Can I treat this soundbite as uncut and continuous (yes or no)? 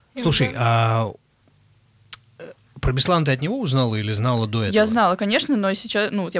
yes